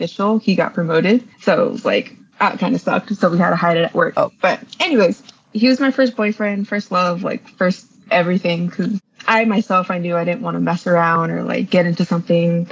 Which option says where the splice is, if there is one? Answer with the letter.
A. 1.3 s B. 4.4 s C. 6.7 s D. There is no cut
A